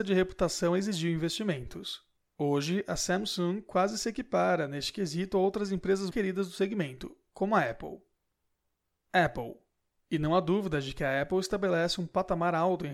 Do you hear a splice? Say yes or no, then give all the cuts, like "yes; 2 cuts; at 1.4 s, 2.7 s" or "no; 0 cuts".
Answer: yes; 1 cut; at 6.1 s